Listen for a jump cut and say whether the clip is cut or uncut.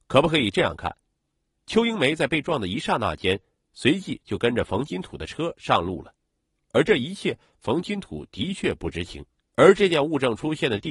cut